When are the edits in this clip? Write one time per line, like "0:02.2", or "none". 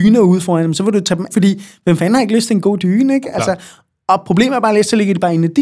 0:01.3